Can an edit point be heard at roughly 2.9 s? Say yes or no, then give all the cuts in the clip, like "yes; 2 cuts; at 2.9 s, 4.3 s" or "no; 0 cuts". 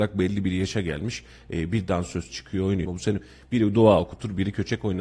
yes; 1 cut; at 2.9 s